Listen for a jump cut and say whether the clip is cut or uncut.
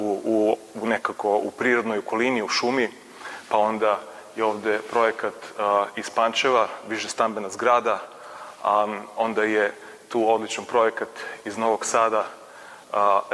uncut